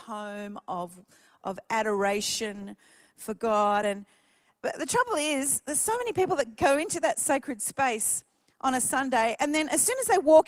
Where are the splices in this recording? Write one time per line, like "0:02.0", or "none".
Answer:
none

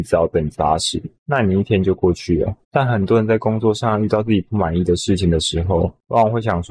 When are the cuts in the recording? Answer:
0:02.6

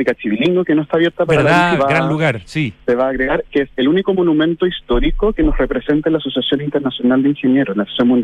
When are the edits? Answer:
0:01.8

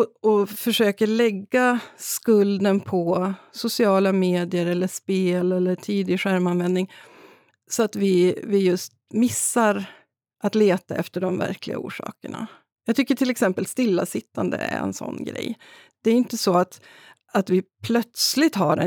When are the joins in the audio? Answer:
none

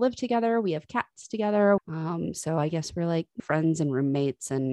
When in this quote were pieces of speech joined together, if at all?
0:01.8
0:03.4

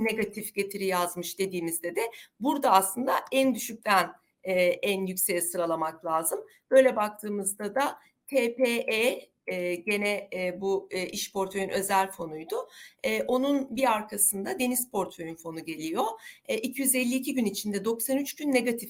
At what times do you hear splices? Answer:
none

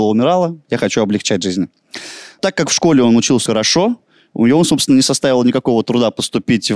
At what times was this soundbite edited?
0:03.5

